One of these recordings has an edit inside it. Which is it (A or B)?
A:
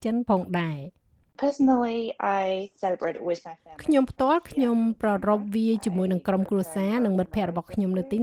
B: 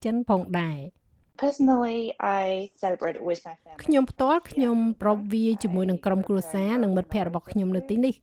B